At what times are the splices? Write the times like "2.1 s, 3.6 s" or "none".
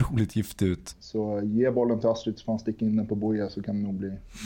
0.9 s